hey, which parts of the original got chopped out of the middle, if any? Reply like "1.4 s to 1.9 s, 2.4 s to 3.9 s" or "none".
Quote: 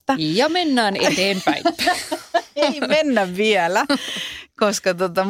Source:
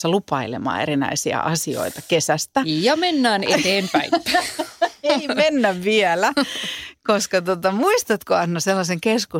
none